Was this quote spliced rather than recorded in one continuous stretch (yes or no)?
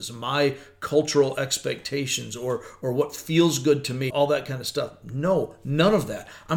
yes